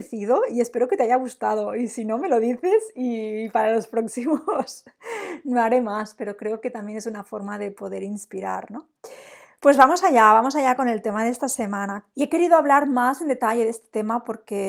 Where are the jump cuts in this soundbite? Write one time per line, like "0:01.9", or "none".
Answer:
0:12.1